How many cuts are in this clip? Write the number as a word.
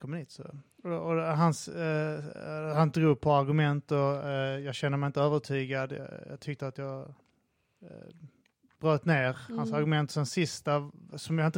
zero